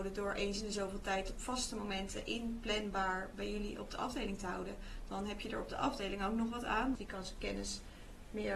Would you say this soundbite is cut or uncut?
cut